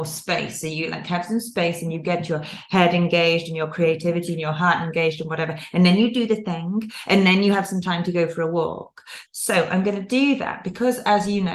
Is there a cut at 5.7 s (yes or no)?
no